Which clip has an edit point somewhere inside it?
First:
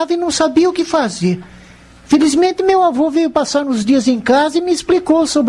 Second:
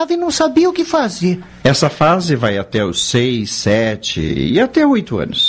second; 1 cut; at 1.6 s

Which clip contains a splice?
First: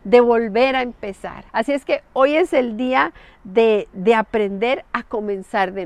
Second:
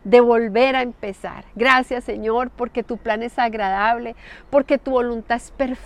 first; 1 cut; at 1.5 s

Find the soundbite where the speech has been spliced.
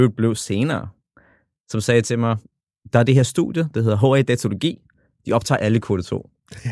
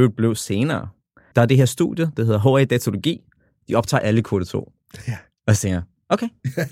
second; 1 cut; at 1.3 s

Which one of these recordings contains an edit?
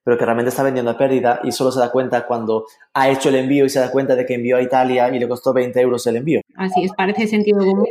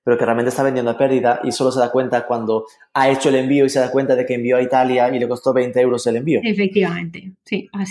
first; 1 cut; at 6.4 s

